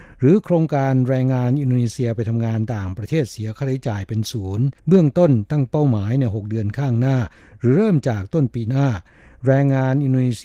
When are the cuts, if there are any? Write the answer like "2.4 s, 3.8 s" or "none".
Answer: 4.8 s